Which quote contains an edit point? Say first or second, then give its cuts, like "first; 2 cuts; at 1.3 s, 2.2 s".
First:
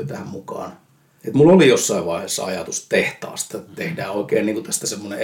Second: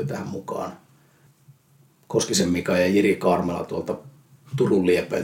first; 2 cuts; at 1.2 s, 3.5 s